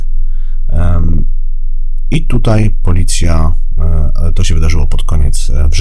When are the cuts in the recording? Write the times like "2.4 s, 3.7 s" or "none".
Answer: none